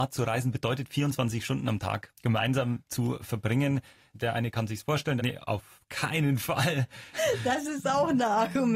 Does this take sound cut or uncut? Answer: cut